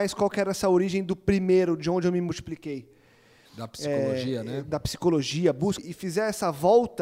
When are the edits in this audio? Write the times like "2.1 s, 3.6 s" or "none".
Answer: 3.5 s, 5.8 s

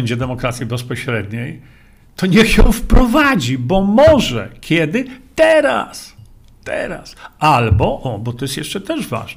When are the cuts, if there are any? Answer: none

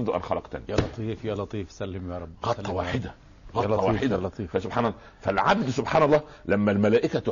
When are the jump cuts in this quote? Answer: none

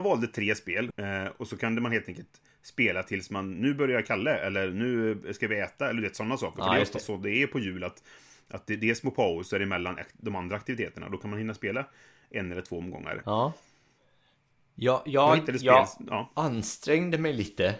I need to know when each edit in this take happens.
0.9 s, 13.2 s

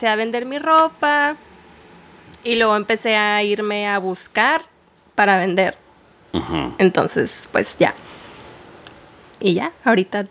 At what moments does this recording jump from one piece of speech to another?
none

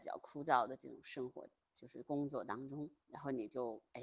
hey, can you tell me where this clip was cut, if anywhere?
none

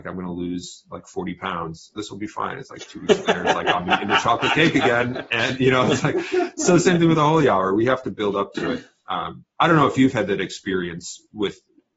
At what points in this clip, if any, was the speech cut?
2.0 s

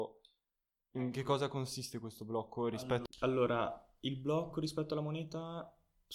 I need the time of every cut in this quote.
3.1 s

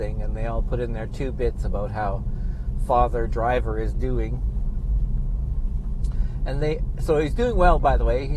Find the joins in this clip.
none

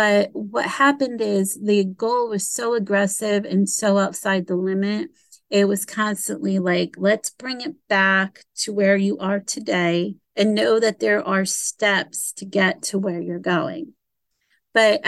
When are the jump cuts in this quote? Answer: 10.2 s

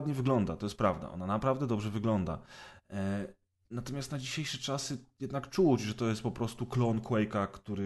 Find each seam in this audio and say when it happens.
none

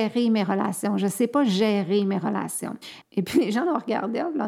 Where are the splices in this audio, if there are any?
3.0 s

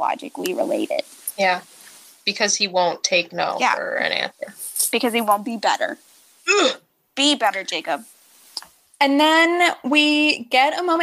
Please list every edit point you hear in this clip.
none

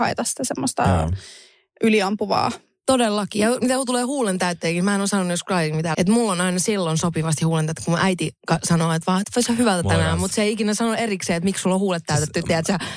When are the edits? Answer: 5.9 s, 9.2 s

